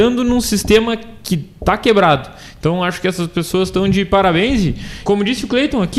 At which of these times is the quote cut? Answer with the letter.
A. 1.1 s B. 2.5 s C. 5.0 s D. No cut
C